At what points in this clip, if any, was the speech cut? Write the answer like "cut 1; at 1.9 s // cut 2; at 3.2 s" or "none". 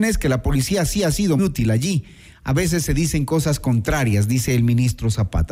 cut 1; at 1.4 s